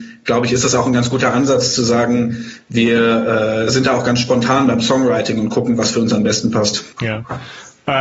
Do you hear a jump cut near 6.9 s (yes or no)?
yes